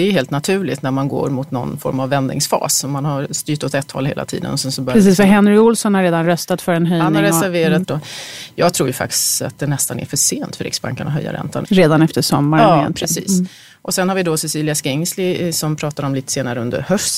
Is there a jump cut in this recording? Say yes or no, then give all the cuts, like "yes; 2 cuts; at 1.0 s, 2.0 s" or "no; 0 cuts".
yes; 2 cuts; at 7.8 s, 11.6 s